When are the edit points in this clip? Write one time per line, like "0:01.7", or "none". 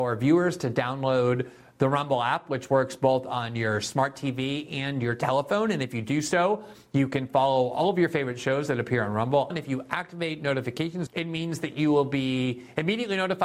0:09.5
0:11.1

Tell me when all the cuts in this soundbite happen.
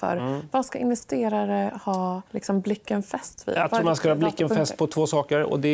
0:02.3

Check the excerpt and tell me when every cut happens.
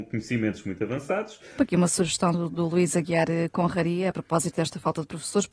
0:01.6

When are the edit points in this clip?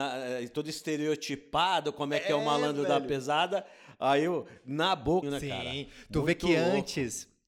0:05.2

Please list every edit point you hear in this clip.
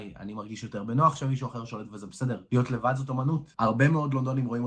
0:02.5
0:03.5

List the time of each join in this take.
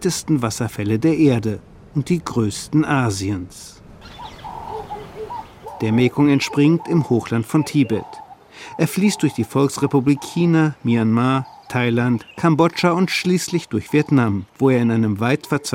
0:12.3
0:14.5

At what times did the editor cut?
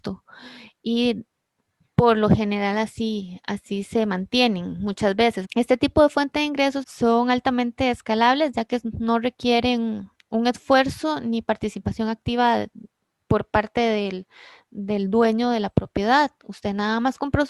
0:05.4
0:06.8

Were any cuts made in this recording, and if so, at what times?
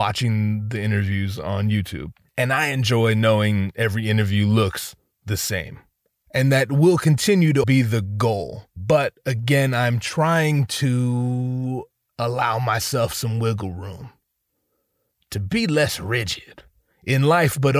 0:06.1
0:07.6

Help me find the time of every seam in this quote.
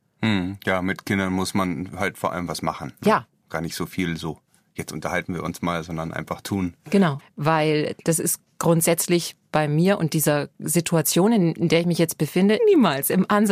0:07.2
0:12.6

